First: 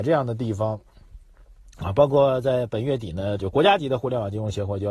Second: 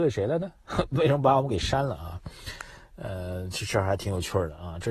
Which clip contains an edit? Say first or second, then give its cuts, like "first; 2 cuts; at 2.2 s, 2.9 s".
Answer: first; 1 cut; at 3.4 s